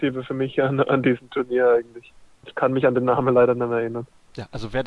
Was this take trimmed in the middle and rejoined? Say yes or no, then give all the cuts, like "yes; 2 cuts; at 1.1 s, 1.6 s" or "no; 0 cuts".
yes; 1 cut; at 2.4 s